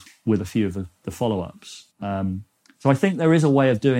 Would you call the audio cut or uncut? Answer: cut